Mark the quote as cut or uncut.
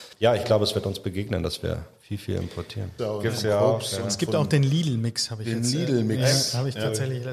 cut